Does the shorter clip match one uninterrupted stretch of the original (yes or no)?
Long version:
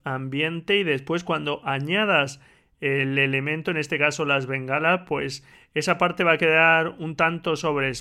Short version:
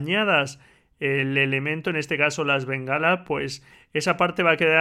yes